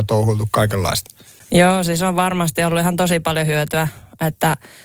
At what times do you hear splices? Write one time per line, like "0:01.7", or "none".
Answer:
none